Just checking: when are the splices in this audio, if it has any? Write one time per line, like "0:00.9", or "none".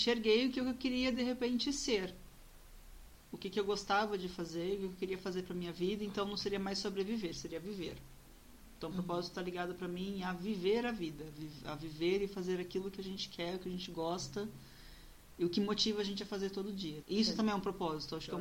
0:17.0